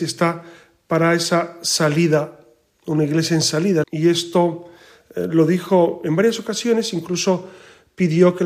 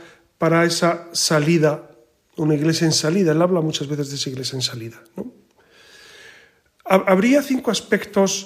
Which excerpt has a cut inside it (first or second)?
first